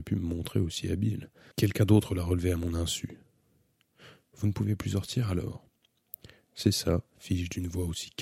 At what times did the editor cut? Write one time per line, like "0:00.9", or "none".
0:01.5